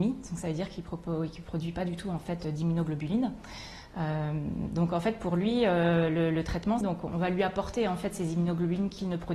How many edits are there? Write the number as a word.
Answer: one